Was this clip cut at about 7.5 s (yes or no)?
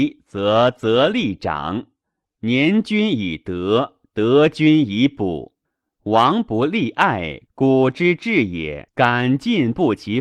yes